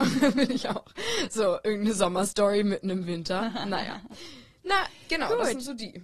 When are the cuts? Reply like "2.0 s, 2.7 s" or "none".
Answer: none